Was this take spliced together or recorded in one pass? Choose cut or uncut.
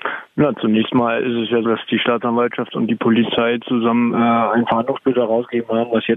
cut